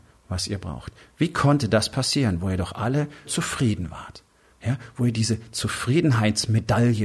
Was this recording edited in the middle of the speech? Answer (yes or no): yes